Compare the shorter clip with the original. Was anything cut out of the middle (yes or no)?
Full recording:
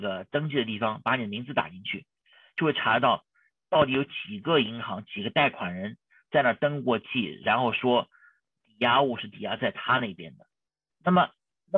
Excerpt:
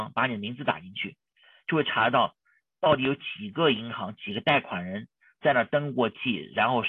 no